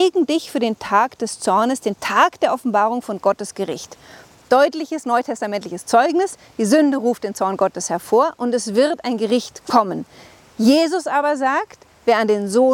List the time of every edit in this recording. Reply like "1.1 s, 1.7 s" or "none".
none